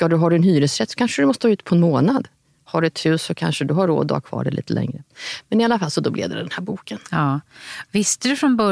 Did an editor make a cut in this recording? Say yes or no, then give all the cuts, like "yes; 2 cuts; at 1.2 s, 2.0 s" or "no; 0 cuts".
no; 0 cuts